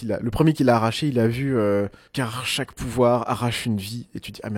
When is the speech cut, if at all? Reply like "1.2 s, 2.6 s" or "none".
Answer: 2.1 s